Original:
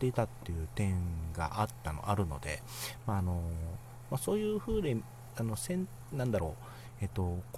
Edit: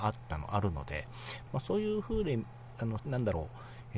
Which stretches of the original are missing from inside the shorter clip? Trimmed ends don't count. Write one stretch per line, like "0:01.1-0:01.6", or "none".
0:03.0-0:04.1
0:05.6-0:06.1

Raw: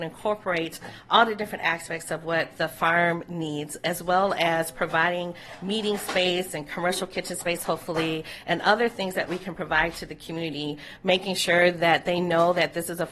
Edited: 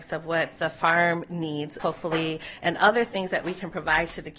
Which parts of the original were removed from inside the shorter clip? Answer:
0:03.8-0:07.6

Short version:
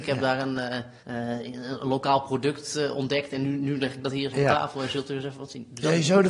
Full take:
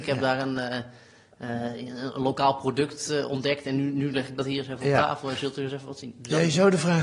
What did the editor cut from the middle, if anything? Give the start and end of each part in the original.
0:01.0-0:01.3
0:04.6-0:04.8

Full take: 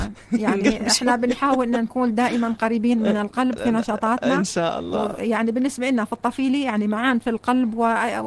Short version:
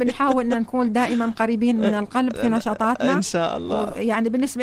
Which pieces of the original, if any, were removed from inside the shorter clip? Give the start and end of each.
none

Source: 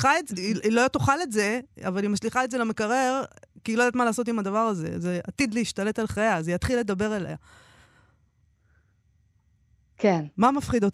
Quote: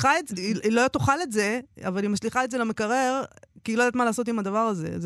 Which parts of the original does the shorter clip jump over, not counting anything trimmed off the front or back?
none

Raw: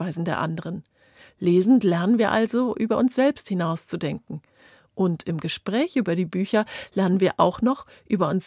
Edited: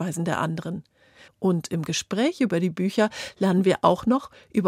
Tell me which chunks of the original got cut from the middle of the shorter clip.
0:01.3-0:04.8

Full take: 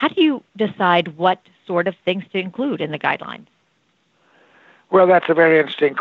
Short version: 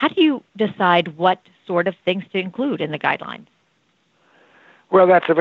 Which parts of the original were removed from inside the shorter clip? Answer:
none

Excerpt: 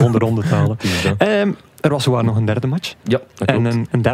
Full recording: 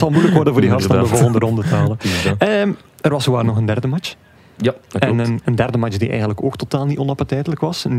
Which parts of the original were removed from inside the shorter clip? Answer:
0:04.2-0:04.5

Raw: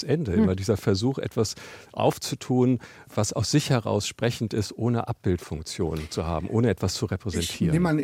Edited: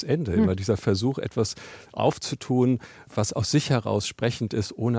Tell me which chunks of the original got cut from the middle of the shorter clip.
none

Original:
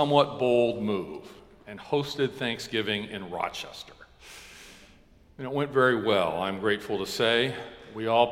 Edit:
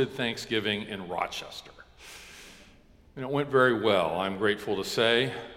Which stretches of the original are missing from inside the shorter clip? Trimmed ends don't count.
none

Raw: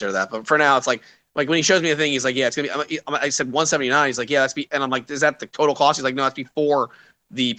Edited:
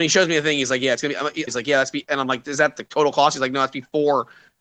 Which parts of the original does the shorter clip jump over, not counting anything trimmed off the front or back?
0:03.0-0:04.1

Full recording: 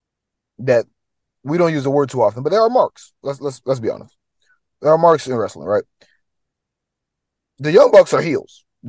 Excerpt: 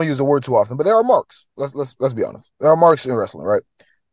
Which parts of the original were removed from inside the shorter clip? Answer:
0:04.2-0:04.8

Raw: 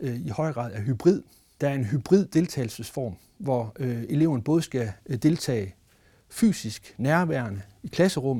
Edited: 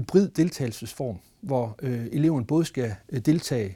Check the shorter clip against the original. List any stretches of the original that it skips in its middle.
none

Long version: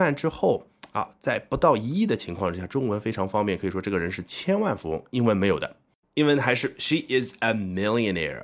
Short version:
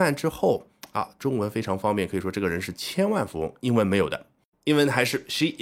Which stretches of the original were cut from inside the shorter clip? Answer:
0:01.2-0:02.7

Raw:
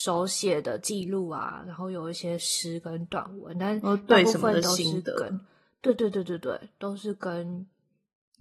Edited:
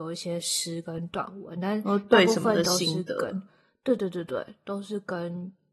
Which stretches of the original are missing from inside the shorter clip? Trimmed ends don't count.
0:05.9-0:06.1

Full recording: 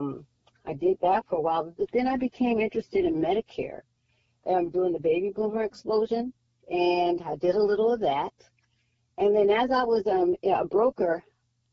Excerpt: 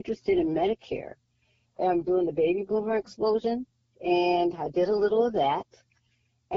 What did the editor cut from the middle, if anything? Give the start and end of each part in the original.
none

